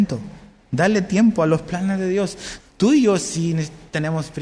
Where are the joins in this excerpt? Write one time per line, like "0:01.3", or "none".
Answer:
0:02.6